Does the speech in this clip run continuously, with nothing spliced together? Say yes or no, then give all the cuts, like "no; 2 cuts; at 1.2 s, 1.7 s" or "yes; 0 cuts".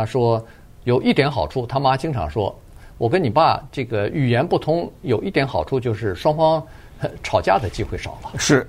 yes; 0 cuts